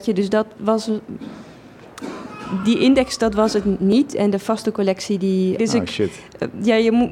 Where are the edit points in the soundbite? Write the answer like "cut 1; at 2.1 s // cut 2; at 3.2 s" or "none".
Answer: cut 1; at 5.6 s